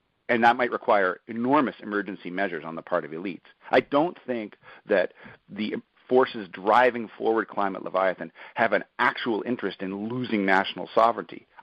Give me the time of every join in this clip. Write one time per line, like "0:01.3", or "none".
0:03.6